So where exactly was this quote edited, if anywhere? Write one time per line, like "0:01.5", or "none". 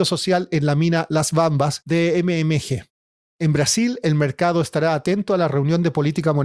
none